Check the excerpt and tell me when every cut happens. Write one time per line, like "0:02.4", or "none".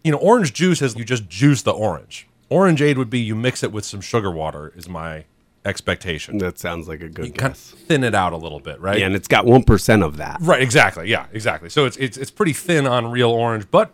0:00.9